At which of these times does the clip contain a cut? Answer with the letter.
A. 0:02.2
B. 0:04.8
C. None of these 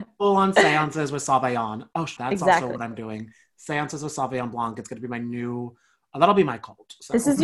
A